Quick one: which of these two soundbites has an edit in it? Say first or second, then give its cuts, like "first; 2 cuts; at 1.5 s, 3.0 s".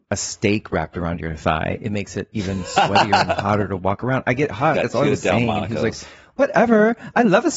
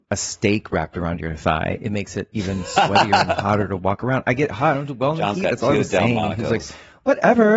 first; 1 cut; at 4.7 s